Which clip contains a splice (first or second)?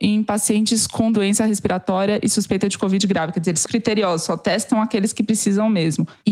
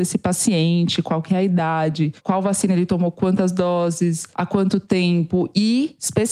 first